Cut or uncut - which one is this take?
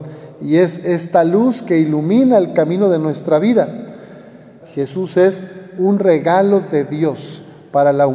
cut